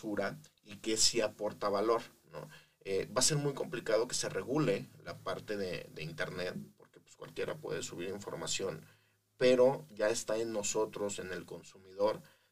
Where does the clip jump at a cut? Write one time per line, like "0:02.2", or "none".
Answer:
none